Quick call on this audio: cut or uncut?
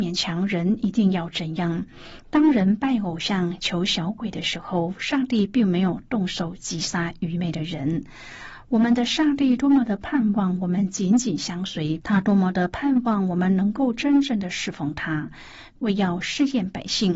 cut